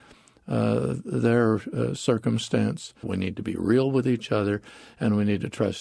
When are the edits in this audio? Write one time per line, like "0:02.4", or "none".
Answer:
0:03.0